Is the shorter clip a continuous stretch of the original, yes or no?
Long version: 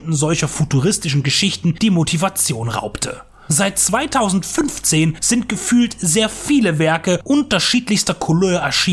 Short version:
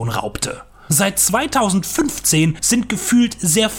yes